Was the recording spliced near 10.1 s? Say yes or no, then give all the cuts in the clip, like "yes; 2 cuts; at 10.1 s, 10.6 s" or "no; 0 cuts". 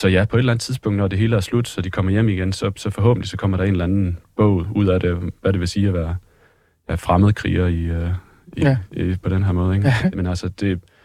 yes; 1 cut; at 10.1 s